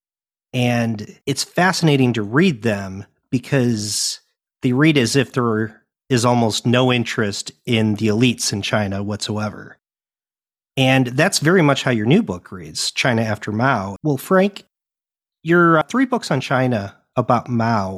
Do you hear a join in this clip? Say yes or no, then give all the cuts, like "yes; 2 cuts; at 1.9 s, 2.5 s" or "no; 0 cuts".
yes; 3 cuts; at 1.2 s, 14.0 s, 15.8 s